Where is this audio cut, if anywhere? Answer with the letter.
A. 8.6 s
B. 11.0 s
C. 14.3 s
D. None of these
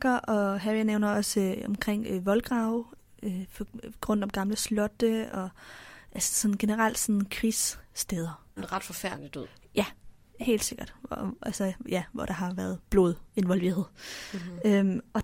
A